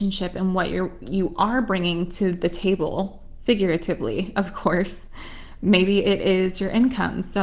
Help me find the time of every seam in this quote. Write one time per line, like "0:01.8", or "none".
none